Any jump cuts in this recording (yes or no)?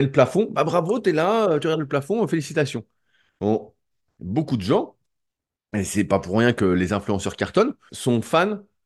yes